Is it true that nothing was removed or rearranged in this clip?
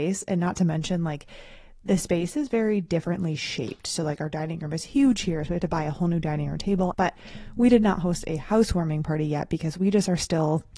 no; 1 cut; at 6.9 s

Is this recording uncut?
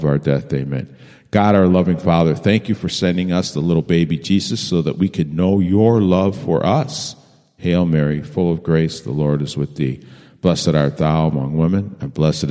yes; 0 cuts

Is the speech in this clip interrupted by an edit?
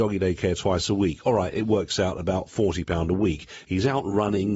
yes; 1 cut; at 3.6 s

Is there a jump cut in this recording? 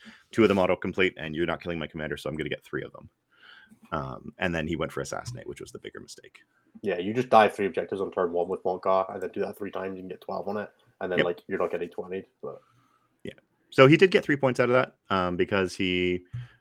no; 0 cuts

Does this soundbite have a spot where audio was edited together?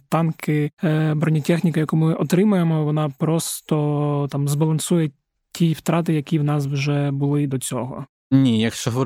no; 0 cuts

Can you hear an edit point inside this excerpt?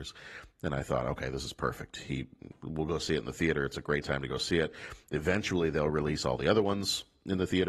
no; 0 cuts

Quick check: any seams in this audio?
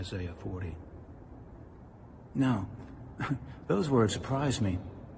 yes; 1 cut; at 4.1 s

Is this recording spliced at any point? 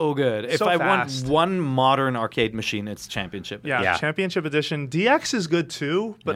no; 0 cuts

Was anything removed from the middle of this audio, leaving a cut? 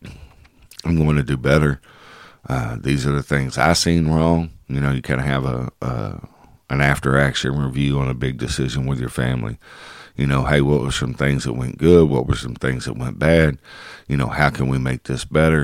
no; 0 cuts

